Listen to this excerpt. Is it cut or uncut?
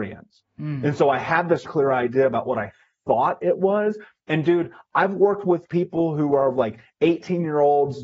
cut